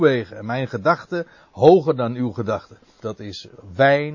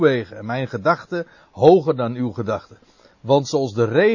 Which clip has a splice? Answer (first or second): first